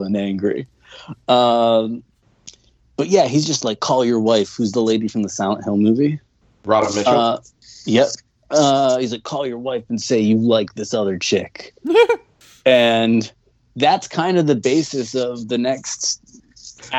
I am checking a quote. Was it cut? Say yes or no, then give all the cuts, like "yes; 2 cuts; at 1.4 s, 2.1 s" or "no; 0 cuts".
no; 0 cuts